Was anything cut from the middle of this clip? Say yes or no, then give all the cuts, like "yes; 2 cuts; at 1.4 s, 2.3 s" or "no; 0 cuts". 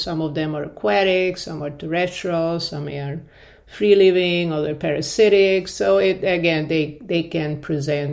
no; 0 cuts